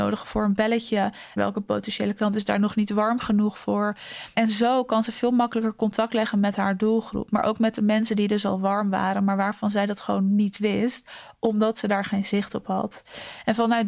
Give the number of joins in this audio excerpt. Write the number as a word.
one